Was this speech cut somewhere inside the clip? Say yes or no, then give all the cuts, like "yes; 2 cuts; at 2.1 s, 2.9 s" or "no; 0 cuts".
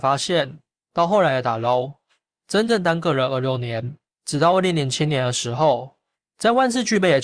no; 0 cuts